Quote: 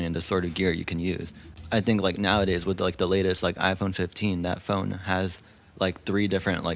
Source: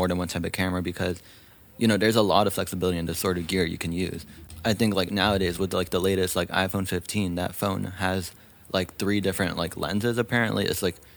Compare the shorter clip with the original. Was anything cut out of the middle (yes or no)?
no